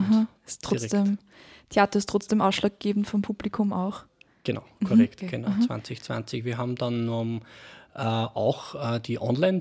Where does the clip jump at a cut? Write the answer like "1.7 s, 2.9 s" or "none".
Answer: 5.2 s